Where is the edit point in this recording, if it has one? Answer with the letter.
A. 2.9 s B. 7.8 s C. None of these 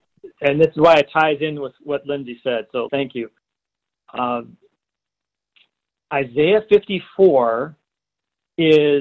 A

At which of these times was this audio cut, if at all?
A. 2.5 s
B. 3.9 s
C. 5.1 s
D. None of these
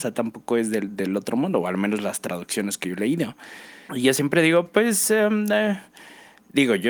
B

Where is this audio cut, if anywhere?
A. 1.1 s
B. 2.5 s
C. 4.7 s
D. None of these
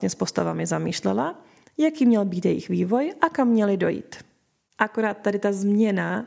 C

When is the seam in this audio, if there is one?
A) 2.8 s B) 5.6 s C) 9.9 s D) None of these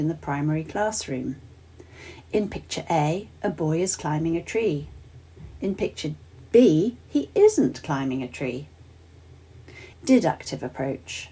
C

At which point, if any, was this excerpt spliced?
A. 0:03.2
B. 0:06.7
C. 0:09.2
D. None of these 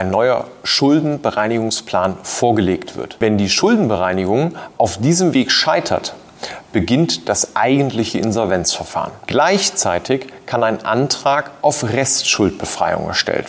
B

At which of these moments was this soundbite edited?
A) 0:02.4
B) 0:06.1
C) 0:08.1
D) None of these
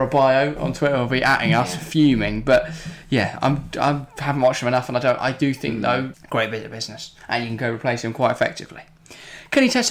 B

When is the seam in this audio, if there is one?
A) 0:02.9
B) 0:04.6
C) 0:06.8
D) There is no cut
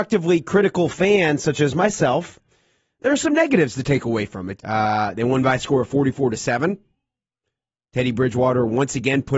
B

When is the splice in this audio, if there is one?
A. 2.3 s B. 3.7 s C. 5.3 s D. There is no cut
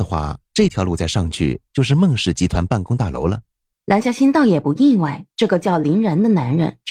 B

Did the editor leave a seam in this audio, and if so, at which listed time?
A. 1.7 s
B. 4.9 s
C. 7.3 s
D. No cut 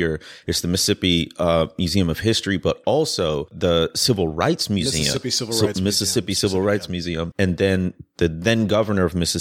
C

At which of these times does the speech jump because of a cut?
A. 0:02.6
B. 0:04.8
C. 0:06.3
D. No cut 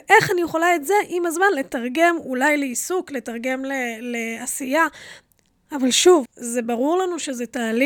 C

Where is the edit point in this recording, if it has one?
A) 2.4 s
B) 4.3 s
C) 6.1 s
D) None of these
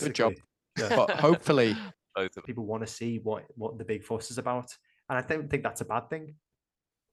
A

